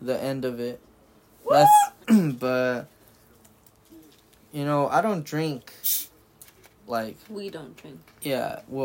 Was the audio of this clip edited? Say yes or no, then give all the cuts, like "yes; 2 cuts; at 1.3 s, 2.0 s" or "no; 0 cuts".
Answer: yes; 1 cut; at 2.0 s